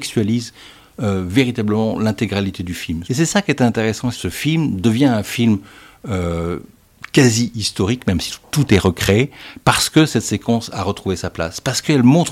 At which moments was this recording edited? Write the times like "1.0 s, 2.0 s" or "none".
3.0 s, 4.1 s